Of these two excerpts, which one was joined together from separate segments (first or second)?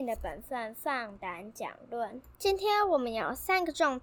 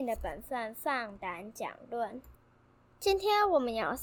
first